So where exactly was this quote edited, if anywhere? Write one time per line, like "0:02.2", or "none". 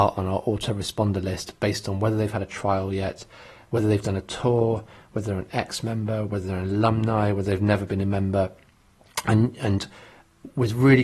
0:03.6

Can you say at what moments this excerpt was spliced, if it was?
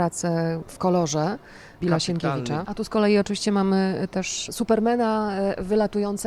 0:02.6

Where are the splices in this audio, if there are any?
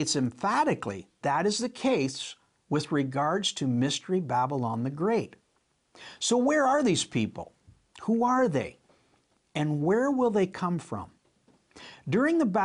0:01.2

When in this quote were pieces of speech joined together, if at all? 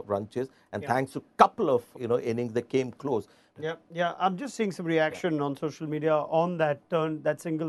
0:01.9
0:03.5

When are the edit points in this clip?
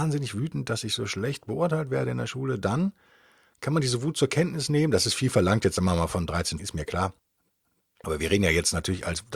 0:06.6

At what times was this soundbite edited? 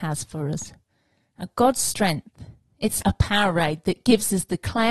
0:03.0

